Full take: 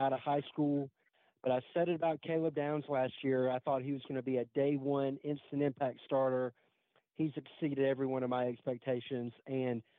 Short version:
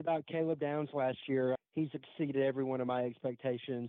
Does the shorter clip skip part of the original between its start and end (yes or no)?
yes